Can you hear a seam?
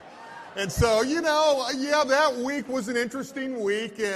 no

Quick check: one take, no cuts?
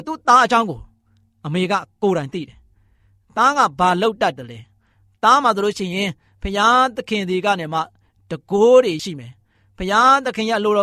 no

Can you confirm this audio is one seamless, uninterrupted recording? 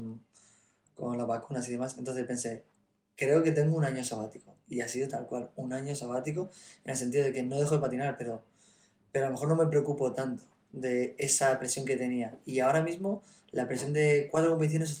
yes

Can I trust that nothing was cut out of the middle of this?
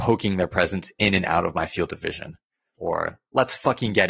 no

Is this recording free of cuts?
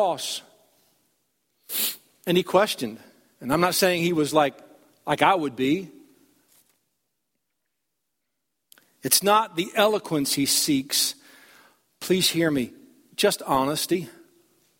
yes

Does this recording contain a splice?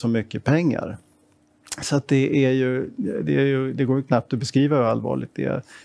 no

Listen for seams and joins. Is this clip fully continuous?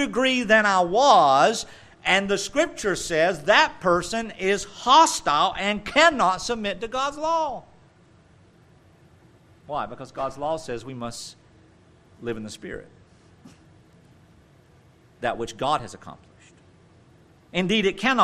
yes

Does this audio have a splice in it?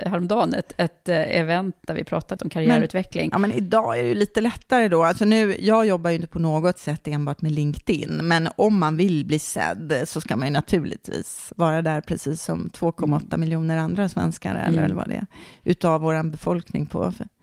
yes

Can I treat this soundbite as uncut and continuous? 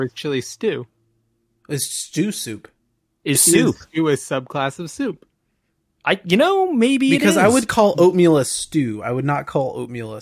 no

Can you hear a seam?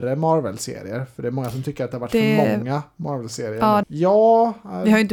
yes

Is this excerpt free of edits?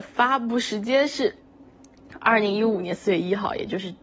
yes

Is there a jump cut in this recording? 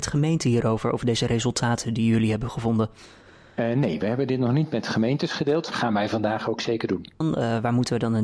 yes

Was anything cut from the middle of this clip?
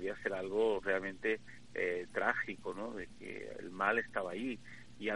no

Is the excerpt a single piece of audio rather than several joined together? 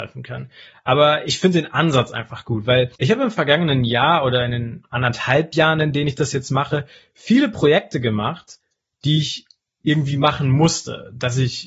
no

